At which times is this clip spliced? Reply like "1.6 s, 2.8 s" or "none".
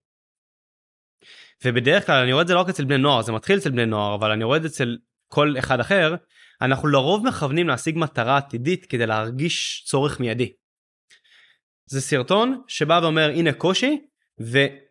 11.9 s